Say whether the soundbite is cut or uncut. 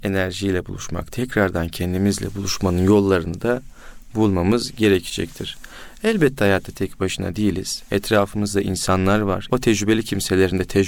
cut